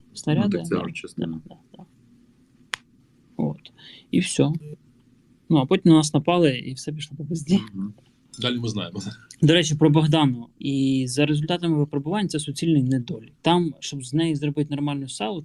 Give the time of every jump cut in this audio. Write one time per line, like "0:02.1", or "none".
0:10.5
0:13.4